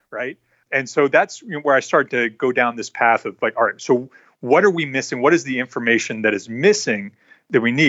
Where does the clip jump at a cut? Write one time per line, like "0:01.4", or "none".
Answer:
none